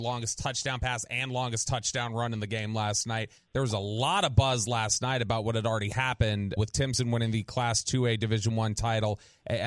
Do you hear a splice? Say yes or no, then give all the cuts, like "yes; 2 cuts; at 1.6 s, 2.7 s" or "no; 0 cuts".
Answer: yes; 2 cuts; at 3.4 s, 6.6 s